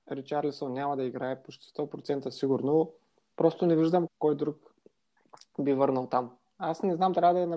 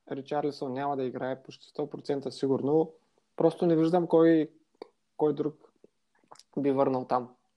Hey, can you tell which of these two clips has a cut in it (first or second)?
first